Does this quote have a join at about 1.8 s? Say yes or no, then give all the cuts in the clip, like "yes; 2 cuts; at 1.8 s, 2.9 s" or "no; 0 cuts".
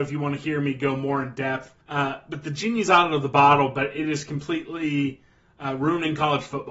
yes; 1 cut; at 1.8 s